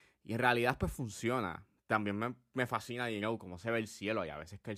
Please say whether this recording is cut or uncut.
uncut